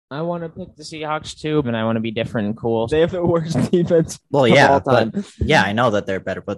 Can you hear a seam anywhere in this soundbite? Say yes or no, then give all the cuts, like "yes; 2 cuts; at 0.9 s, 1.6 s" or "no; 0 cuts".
yes; 2 cuts; at 1.6 s, 2.9 s